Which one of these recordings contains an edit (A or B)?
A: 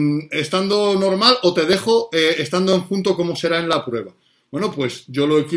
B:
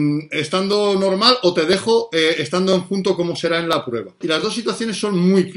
B